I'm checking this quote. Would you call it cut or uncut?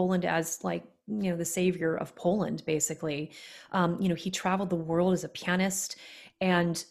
uncut